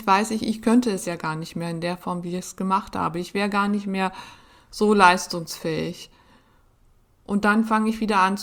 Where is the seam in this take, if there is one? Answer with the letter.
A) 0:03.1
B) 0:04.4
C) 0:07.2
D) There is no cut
D